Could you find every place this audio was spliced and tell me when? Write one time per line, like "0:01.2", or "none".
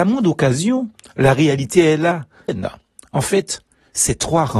0:02.5